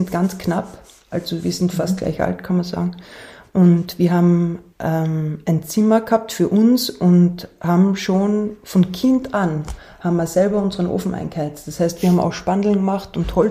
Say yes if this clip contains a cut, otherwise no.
no